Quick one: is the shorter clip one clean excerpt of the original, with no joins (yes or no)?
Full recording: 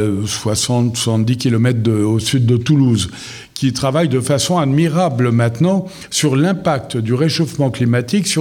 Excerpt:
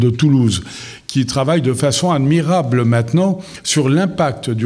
yes